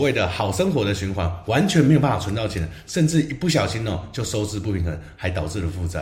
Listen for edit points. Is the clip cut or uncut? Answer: uncut